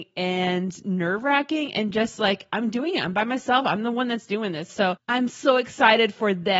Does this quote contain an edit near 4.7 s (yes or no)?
yes